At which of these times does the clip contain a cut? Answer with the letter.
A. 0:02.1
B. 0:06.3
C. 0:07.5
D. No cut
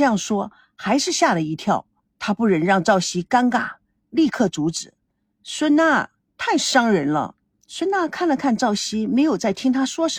B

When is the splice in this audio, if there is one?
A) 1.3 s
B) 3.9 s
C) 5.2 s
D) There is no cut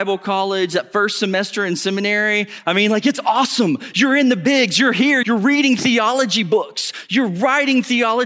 C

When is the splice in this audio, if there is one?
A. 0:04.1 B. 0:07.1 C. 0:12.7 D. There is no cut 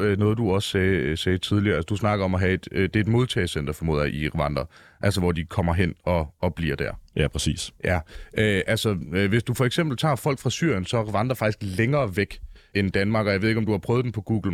C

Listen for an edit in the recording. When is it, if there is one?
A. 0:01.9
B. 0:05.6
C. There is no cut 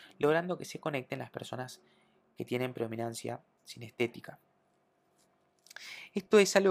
C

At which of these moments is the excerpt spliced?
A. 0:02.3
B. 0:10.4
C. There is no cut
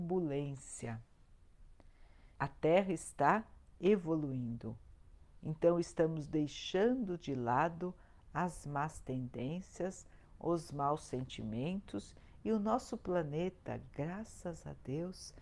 A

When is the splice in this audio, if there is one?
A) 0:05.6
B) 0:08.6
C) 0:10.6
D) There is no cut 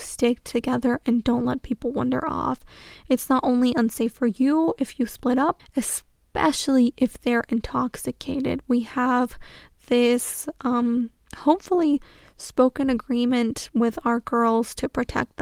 A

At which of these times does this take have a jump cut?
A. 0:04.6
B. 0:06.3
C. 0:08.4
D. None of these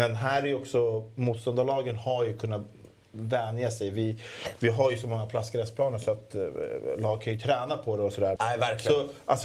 C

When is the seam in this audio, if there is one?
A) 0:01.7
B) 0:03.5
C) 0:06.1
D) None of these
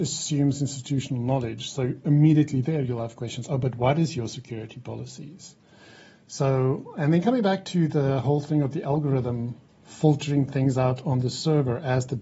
D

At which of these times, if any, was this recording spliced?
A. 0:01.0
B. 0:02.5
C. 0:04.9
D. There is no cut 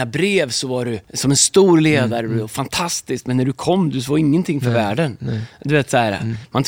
A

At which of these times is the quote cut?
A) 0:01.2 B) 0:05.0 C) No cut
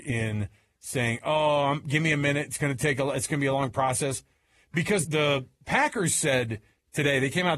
B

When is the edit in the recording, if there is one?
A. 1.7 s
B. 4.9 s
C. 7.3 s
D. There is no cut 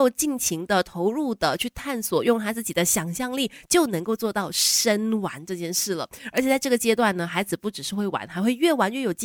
D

